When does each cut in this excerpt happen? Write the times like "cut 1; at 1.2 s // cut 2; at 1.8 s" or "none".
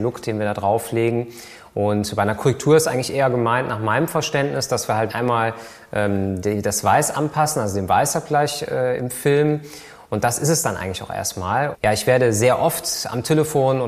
cut 1; at 5.1 s // cut 2; at 11.7 s

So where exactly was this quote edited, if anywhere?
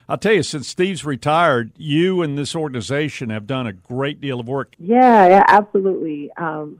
cut 1; at 4.7 s

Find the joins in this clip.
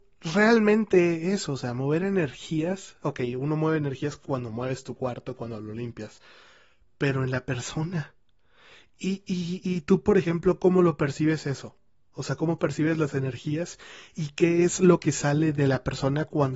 none

